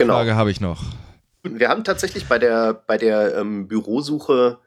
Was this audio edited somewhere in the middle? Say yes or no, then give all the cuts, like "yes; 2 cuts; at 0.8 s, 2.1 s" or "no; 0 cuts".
yes; 1 cut; at 1.4 s